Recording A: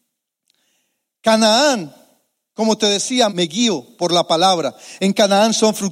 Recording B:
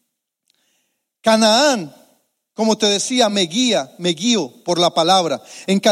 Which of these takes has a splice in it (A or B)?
A